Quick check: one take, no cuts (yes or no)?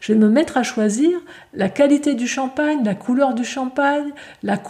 yes